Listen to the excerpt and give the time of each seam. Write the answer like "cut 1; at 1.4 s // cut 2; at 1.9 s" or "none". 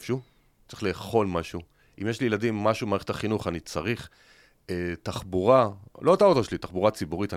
none